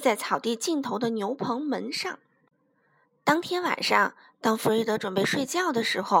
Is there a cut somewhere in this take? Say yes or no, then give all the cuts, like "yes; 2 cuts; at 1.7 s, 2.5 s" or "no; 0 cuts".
no; 0 cuts